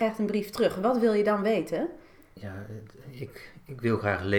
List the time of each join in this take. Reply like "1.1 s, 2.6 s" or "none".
none

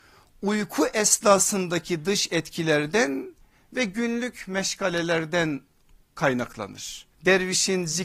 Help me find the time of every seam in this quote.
7.1 s

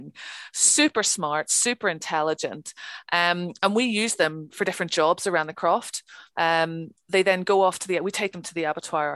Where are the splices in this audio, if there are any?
6.3 s

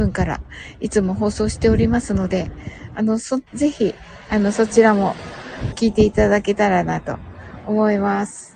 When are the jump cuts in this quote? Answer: 3.5 s, 5.7 s

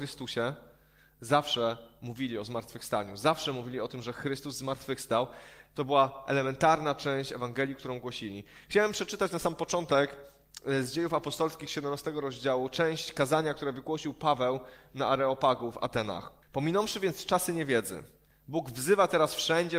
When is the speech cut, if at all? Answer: 16.4 s

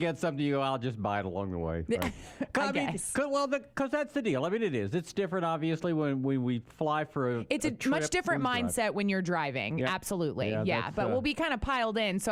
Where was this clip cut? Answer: none

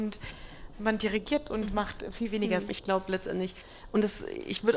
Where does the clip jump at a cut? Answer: 2.7 s

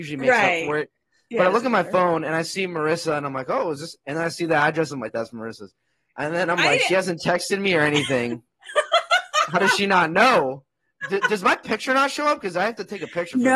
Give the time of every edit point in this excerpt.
none

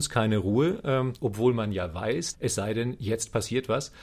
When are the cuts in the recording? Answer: 1.2 s, 2.3 s

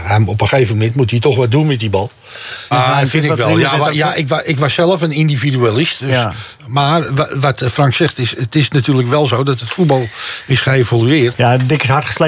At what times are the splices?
2.7 s, 6.6 s, 11.3 s

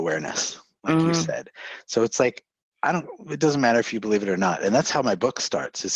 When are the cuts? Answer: none

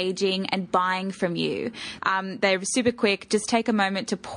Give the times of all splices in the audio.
2.0 s

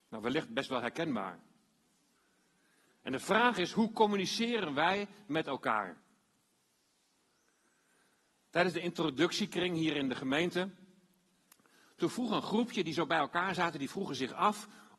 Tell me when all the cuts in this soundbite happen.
none

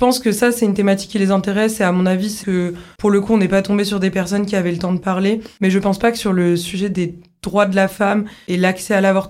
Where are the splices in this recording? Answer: 2.4 s

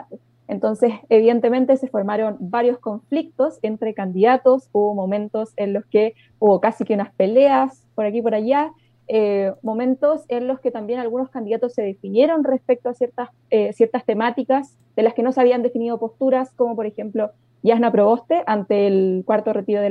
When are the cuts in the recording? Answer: none

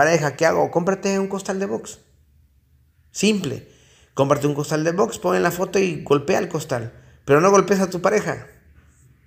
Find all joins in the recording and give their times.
none

